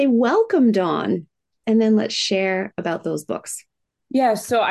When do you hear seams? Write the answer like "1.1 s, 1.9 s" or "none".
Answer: 1.6 s